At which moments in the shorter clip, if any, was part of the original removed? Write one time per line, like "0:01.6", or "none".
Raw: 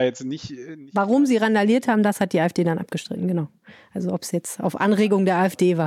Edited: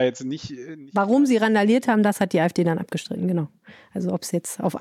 none